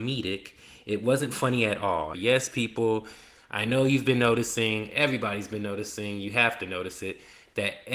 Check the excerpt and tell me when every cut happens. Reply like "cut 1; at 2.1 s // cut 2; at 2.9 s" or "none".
cut 1; at 2.1 s